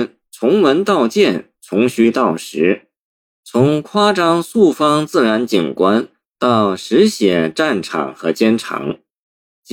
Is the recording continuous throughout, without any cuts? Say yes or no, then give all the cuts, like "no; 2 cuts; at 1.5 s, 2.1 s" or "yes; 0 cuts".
yes; 0 cuts